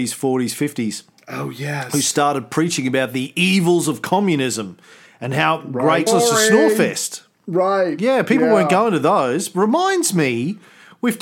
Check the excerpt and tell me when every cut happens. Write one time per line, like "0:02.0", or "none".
0:06.1